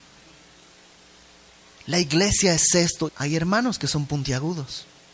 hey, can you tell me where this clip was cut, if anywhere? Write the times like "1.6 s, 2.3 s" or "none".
3.1 s